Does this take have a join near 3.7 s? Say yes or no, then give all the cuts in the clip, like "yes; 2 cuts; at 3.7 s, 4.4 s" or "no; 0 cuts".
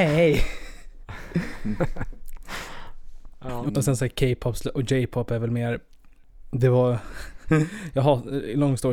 yes; 1 cut; at 3.7 s